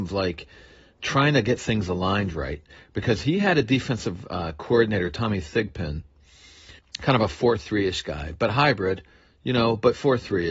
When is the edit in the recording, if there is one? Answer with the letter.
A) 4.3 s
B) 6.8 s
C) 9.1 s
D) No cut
B